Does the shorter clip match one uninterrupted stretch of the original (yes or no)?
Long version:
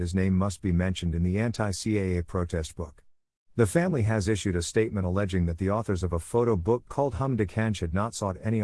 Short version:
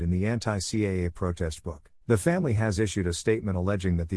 no